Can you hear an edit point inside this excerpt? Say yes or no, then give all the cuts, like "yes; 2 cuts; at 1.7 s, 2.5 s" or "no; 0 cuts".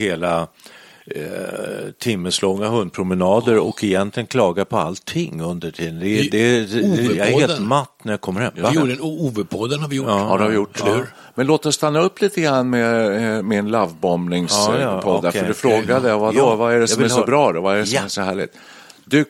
no; 0 cuts